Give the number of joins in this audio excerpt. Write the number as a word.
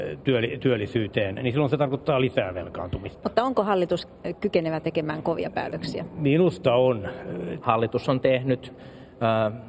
one